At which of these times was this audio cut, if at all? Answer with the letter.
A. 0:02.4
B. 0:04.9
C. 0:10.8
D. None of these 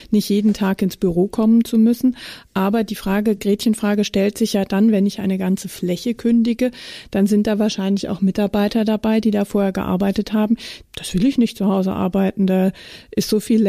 C